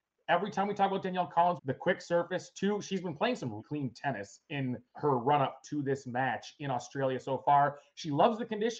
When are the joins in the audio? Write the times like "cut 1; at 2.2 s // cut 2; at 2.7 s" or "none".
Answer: cut 1; at 1.6 s // cut 2; at 3.6 s // cut 3; at 4.9 s